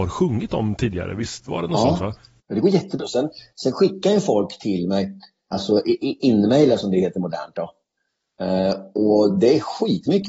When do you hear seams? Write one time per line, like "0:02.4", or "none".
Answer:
0:03.0
0:05.5